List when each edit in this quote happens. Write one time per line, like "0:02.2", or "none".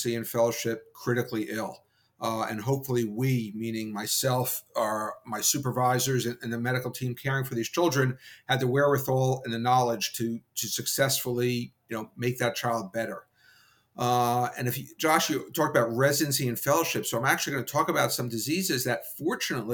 none